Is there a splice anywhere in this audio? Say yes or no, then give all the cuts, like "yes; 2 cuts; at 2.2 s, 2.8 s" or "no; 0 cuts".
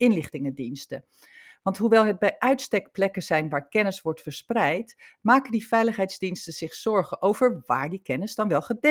no; 0 cuts